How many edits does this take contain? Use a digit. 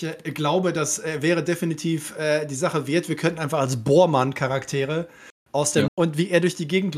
1